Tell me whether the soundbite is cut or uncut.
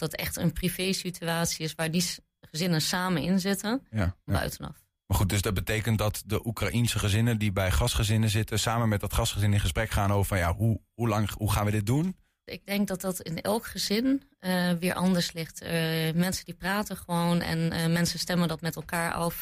cut